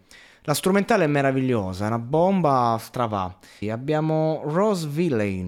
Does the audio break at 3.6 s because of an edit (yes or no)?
yes